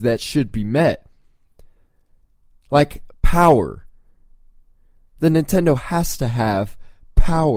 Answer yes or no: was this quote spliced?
no